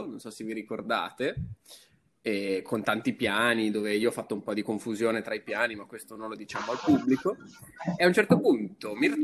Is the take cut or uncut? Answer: uncut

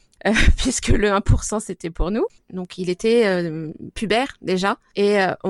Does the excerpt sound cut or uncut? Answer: cut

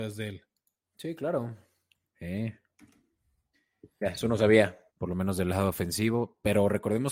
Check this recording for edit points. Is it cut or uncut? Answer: cut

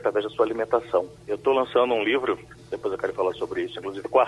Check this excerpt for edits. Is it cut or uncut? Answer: cut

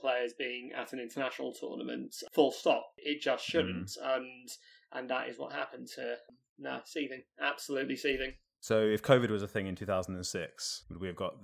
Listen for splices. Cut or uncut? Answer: uncut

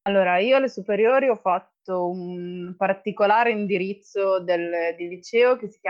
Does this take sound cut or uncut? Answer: uncut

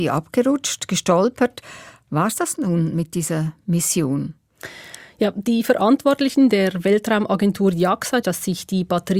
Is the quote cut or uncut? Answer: cut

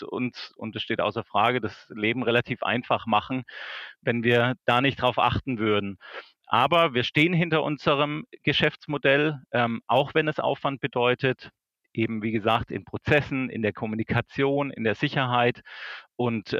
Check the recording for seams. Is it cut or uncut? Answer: uncut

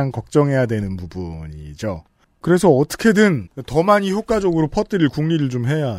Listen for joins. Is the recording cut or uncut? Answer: cut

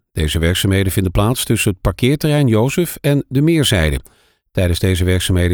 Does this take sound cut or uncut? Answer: uncut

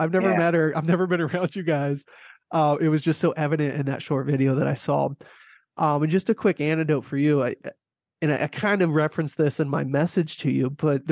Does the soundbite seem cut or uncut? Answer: uncut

